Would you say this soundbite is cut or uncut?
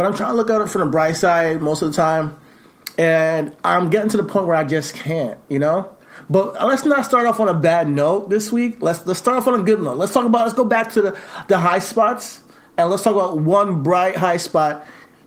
uncut